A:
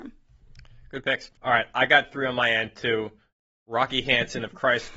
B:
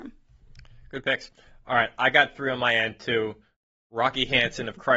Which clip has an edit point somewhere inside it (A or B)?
A